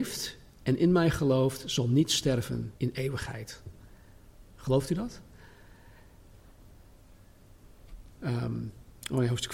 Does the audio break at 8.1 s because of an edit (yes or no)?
yes